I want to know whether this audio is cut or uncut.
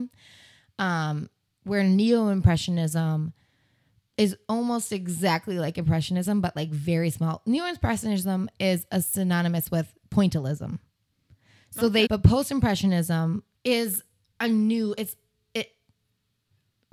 cut